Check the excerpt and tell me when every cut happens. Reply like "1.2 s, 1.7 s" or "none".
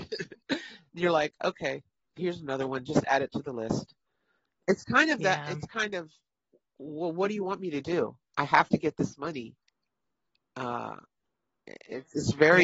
none